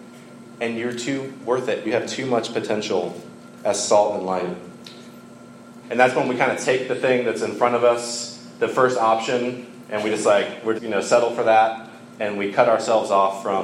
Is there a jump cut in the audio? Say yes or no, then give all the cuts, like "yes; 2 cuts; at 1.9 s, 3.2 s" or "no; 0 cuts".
yes; 3 cuts; at 1.8 s, 5.8 s, 10.8 s